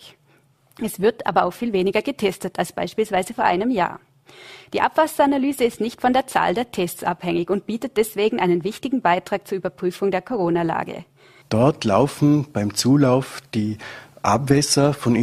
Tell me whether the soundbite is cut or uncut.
cut